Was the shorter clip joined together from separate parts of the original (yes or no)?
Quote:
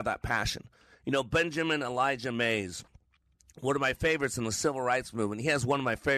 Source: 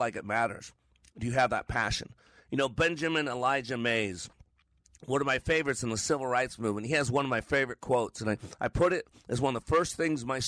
no